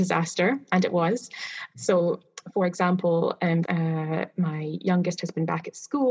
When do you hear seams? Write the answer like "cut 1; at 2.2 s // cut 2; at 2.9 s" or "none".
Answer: cut 1; at 1.7 s // cut 2; at 3.6 s